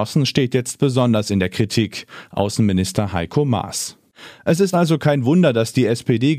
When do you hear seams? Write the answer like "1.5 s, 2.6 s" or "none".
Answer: none